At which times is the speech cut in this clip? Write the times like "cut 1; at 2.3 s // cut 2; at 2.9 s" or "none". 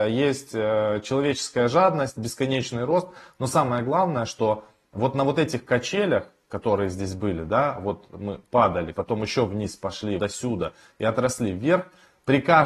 cut 1; at 8.9 s // cut 2; at 10.2 s

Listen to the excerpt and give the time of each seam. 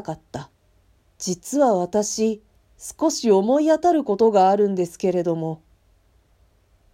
cut 1; at 1.1 s

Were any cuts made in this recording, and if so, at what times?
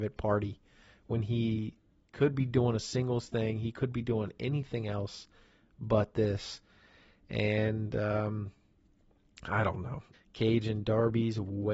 cut 1; at 10.1 s

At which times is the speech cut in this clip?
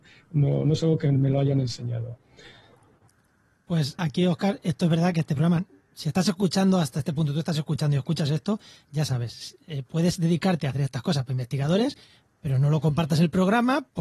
cut 1; at 4.0 s

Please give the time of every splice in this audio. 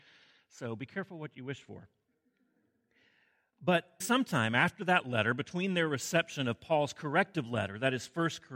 cut 1; at 4.0 s

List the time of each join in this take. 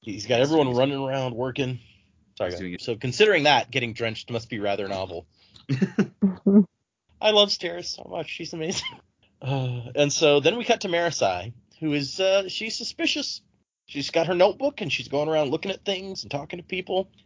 cut 1; at 2.8 s

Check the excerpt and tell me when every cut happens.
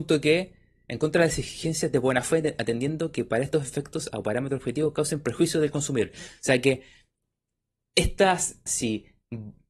cut 1; at 8.7 s

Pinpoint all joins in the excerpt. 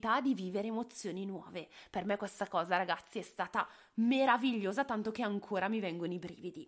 none

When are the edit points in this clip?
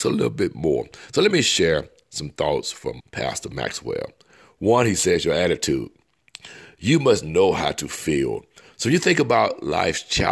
cut 1; at 3.0 s

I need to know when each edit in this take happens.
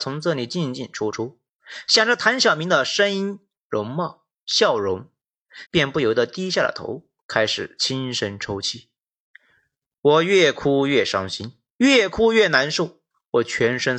cut 1; at 5.7 s

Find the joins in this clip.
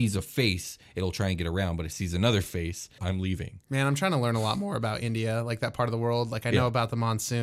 cut 1; at 3.0 s

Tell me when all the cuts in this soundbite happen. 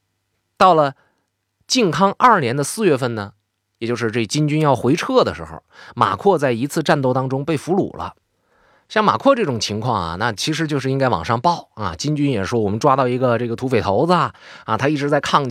none

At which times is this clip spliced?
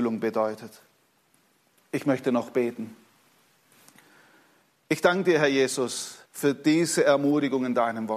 cut 1; at 6.2 s

